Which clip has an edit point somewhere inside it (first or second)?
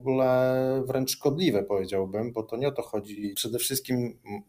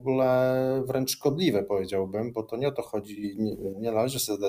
first